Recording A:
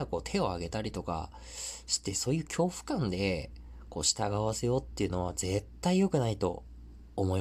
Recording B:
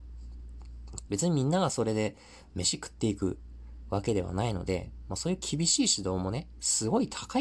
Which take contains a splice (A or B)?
B